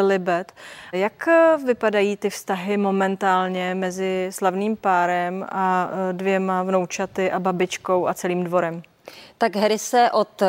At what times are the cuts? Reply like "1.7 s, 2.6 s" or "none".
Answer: 0.9 s